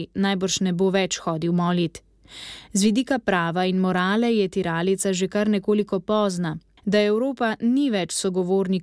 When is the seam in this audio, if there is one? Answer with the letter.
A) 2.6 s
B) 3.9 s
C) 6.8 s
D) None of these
C